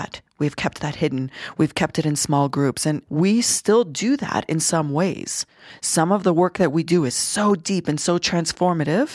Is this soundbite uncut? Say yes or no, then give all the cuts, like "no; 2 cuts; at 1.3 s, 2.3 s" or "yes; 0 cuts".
no; 1 cut; at 3.1 s